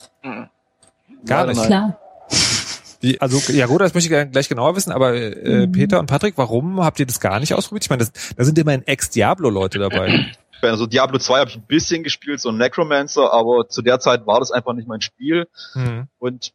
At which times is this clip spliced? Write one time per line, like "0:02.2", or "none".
0:03.2
0:10.6

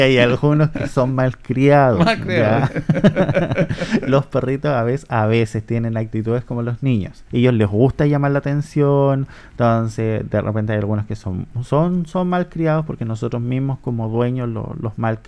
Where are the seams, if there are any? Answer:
0:07.3

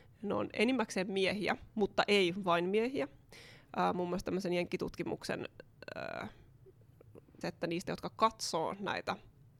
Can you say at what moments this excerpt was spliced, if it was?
0:07.4

